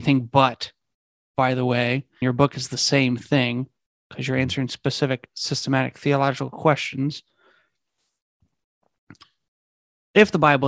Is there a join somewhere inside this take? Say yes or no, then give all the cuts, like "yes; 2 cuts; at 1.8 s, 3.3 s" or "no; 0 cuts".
yes; 1 cut; at 2.2 s